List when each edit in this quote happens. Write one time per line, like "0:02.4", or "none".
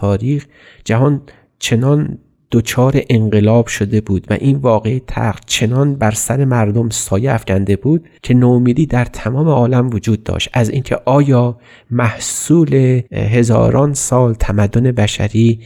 0:08.2
0:13.1